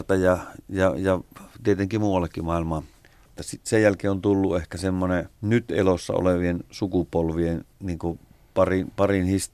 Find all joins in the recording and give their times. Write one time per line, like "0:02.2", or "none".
0:03.3
0:05.4
0:07.7